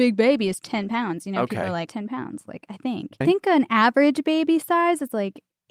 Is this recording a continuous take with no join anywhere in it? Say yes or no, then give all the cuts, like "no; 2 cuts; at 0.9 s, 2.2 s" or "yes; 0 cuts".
no; 2 cuts; at 1.9 s, 3.2 s